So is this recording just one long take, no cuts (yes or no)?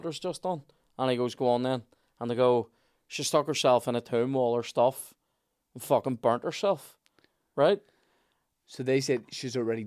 yes